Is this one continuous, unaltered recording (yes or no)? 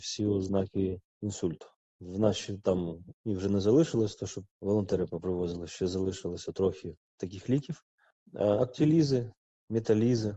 yes